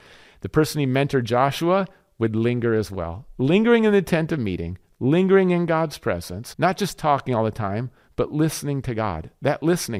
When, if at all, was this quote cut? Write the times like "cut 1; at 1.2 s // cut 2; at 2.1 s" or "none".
cut 1; at 6.5 s